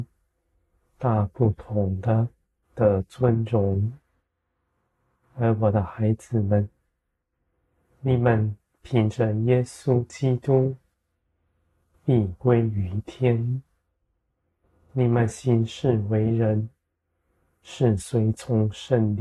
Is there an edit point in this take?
yes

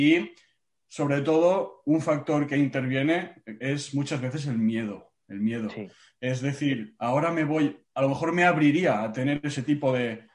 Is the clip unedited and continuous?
yes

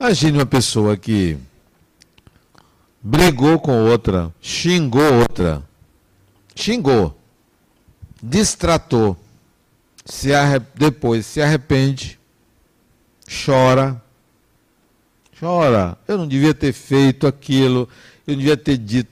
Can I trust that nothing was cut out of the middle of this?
yes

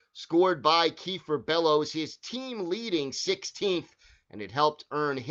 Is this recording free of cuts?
yes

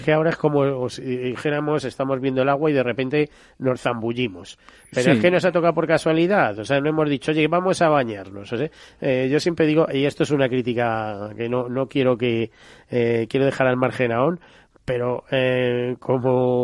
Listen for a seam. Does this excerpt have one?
no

